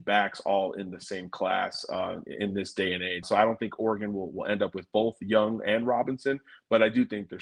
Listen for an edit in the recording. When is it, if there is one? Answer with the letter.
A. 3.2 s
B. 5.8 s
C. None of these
A